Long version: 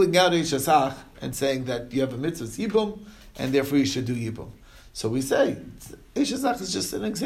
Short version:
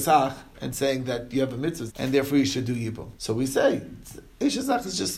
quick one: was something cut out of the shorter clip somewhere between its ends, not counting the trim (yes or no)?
yes